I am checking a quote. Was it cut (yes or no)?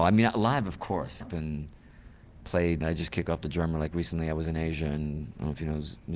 yes